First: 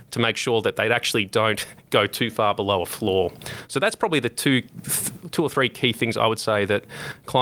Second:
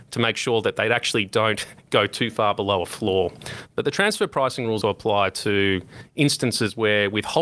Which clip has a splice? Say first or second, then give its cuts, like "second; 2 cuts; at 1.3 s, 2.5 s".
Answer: second; 2 cuts; at 3.7 s, 4.8 s